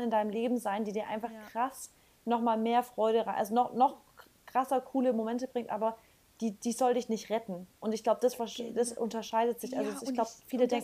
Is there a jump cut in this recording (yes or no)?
no